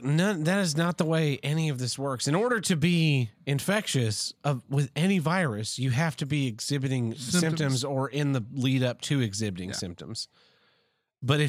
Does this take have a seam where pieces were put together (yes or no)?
no